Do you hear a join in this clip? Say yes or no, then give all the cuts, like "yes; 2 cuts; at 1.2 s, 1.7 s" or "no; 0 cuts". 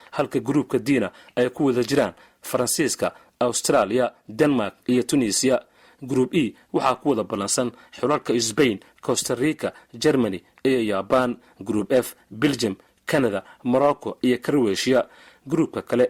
no; 0 cuts